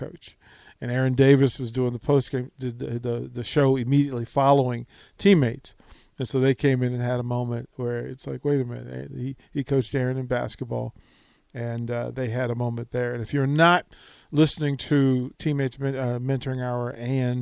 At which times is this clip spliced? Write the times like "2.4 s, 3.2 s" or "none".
none